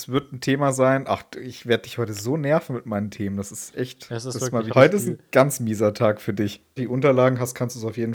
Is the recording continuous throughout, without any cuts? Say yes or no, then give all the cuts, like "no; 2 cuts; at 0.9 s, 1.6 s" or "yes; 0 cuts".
no; 2 cuts; at 4.7 s, 6.8 s